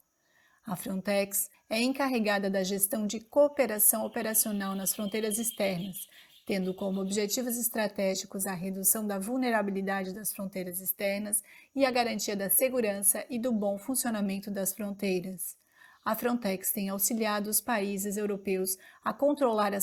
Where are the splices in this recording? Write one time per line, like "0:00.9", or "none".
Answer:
0:01.5